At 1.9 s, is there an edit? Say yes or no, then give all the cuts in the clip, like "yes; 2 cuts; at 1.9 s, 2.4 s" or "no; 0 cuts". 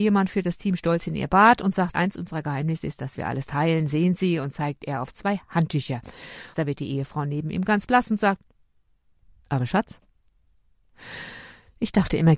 yes; 2 cuts; at 1.9 s, 6.5 s